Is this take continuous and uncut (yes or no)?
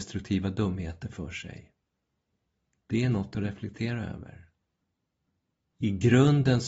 yes